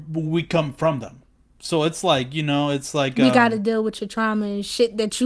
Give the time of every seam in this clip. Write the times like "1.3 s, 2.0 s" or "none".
none